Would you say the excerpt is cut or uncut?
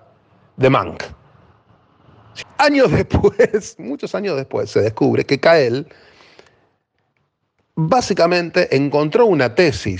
cut